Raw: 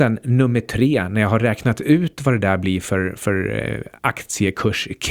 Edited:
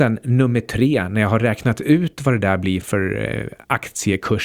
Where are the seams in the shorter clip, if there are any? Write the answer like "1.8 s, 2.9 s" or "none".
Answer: 2.8 s